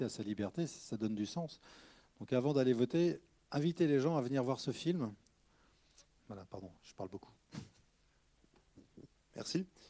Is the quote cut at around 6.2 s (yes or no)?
yes